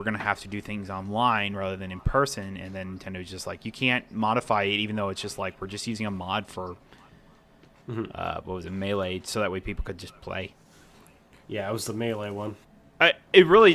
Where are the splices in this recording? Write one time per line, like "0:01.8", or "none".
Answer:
none

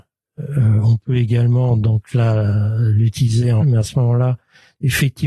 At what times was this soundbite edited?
0:03.6

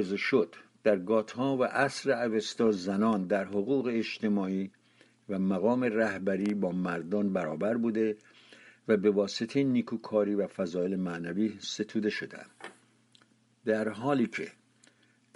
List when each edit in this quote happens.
none

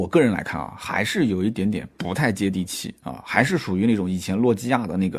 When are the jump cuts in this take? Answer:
none

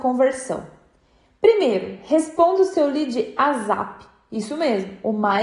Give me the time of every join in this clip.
none

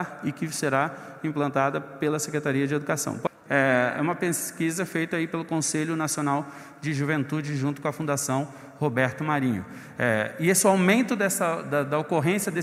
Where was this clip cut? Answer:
0:03.5

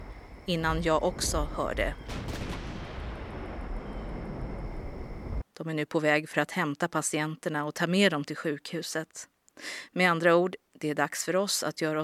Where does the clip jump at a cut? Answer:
0:05.4

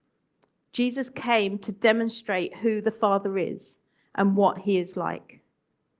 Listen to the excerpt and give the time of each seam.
none

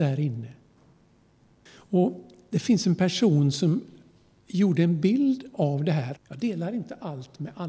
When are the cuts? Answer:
0:01.7
0:06.2

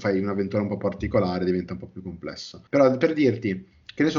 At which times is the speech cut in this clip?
0:02.7

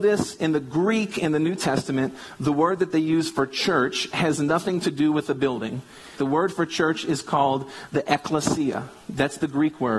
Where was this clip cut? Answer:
0:06.2

